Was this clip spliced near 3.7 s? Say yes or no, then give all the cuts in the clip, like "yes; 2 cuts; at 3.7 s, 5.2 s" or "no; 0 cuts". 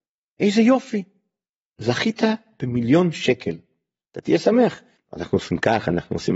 no; 1 cut; at 5.0 s